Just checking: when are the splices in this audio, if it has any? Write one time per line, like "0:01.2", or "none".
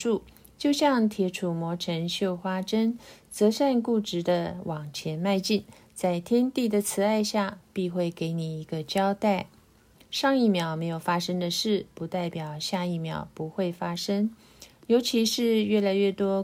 0:10.0